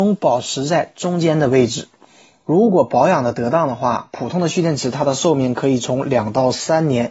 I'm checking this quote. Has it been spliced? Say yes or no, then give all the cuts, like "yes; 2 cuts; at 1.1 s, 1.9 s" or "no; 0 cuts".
no; 0 cuts